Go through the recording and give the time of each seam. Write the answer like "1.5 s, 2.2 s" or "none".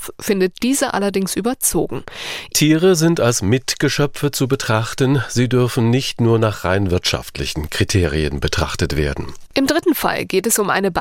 2.5 s, 9.5 s